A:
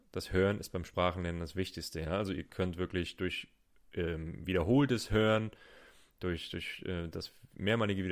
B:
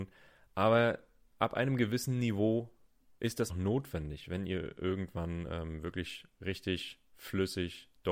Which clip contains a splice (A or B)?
B